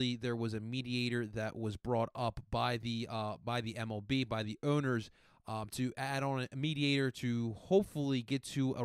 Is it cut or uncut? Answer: uncut